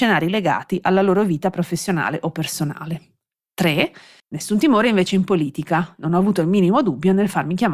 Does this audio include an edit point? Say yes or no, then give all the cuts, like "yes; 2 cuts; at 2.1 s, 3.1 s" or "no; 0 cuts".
yes; 1 cut; at 4.2 s